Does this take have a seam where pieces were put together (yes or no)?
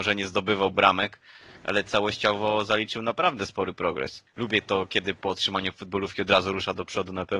yes